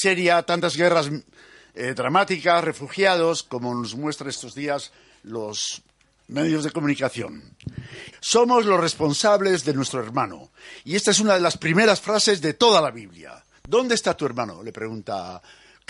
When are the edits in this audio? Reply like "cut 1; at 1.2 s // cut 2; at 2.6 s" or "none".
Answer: cut 1; at 8.1 s